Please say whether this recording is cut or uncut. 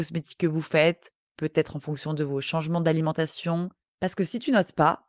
cut